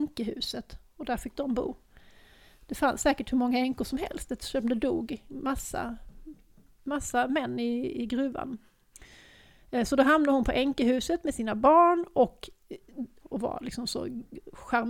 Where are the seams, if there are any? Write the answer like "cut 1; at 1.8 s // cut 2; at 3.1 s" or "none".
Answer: cut 1; at 13.2 s